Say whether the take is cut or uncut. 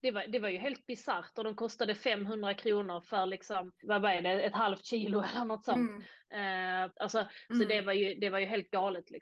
cut